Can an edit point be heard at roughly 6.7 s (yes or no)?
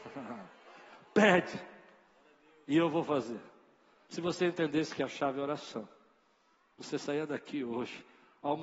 no